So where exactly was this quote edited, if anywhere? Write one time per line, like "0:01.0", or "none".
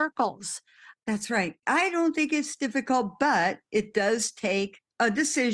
0:01.6